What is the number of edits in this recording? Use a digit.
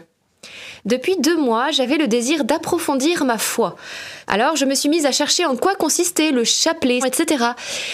2